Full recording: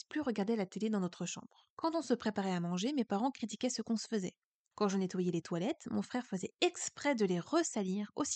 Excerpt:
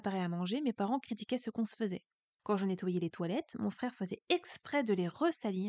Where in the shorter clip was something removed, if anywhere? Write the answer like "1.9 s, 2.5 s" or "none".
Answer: none